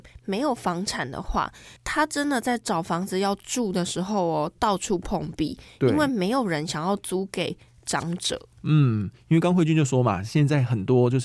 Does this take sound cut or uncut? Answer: uncut